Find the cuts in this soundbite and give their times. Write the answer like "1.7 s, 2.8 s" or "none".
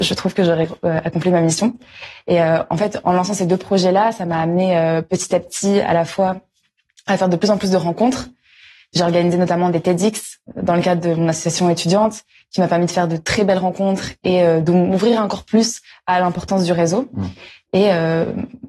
none